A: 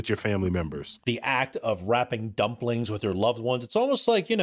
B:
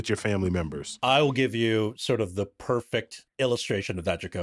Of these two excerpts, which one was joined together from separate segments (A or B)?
A